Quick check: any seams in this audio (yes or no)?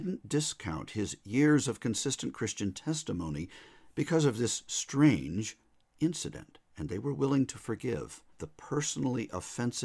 yes